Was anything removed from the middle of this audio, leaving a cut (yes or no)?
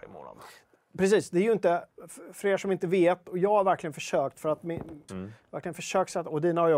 yes